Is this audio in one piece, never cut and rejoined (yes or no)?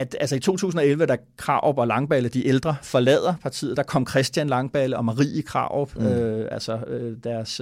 yes